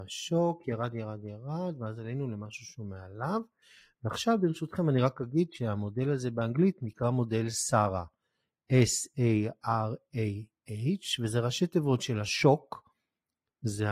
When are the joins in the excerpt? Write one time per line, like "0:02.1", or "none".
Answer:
none